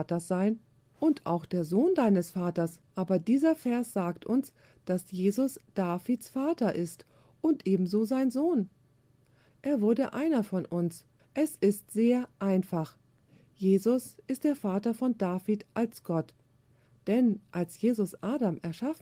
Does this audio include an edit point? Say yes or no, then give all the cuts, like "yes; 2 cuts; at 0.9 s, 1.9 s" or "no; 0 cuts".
yes; 3 cuts; at 2.9 s, 9.5 s, 11.2 s